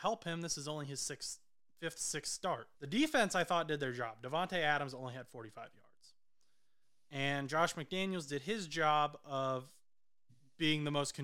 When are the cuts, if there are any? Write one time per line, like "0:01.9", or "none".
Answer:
0:02.7